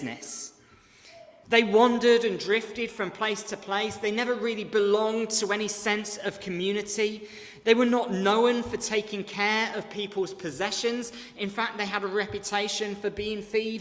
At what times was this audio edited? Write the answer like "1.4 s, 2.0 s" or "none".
1.4 s